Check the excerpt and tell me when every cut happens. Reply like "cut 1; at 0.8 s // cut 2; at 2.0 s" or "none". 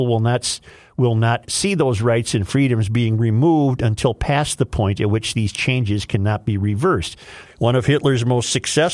cut 1; at 7.5 s